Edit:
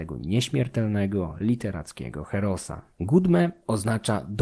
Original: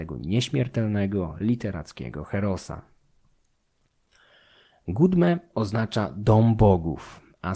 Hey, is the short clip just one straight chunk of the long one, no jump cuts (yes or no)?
no